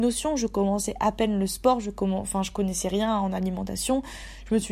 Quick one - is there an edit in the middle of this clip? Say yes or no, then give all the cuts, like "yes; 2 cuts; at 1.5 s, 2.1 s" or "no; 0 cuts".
no; 0 cuts